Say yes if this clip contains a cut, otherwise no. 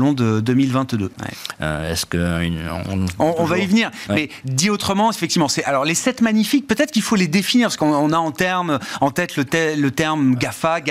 yes